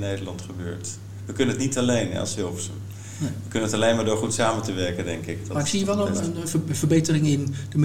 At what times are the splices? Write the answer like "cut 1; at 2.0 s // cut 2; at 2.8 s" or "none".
none